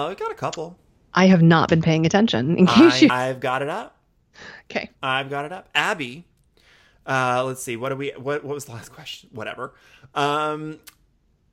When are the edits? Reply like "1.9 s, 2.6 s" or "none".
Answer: 3.1 s